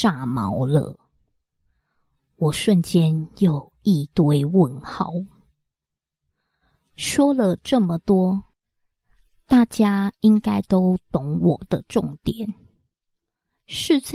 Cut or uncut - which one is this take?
uncut